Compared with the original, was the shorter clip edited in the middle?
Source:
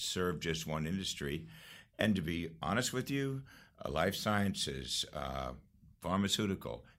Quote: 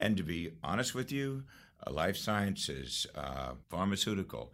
yes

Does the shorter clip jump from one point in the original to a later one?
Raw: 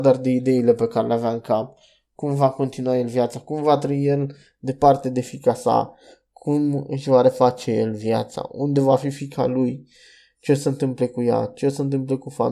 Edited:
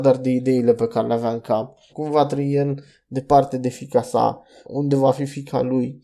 yes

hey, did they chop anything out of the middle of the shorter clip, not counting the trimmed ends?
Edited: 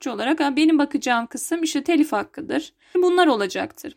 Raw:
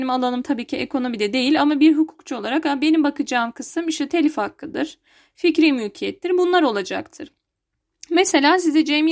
yes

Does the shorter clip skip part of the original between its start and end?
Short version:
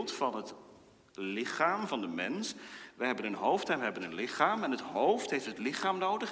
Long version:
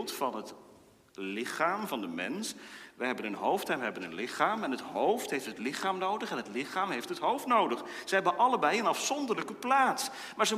no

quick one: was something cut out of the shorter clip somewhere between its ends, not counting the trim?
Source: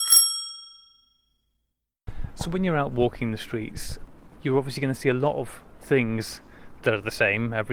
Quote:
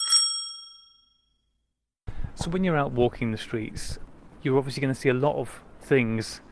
no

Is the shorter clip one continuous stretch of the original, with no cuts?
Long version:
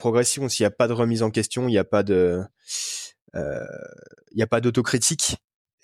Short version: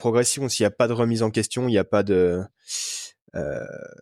yes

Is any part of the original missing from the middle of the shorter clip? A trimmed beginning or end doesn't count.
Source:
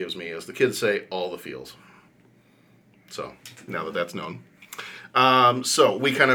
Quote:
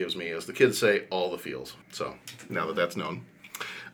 yes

